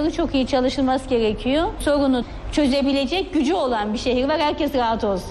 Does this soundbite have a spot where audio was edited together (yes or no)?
no